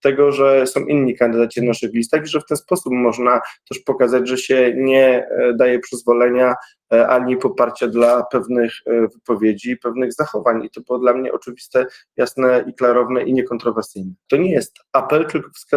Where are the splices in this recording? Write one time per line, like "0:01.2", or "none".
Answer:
0:14.3